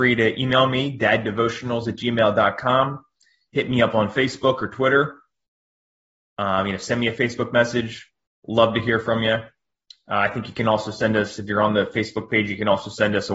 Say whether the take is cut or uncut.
uncut